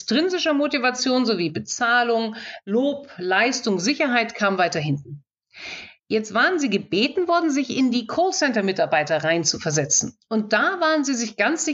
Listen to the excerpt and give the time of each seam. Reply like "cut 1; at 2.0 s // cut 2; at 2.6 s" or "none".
cut 1; at 6.0 s